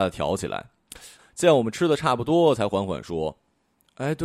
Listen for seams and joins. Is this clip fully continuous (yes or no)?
no